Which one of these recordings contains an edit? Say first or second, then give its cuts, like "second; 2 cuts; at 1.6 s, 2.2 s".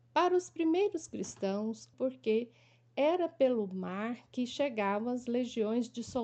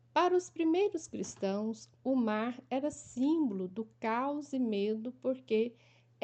first; 1 cut; at 1.9 s